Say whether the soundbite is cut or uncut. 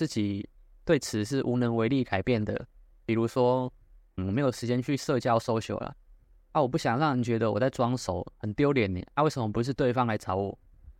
cut